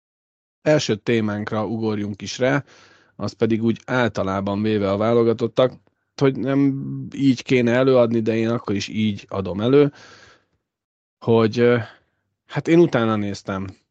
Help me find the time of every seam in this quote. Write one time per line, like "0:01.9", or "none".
0:06.2